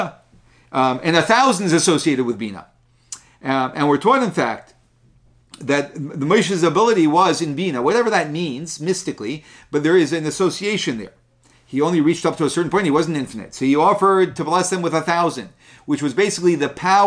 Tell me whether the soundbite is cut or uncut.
cut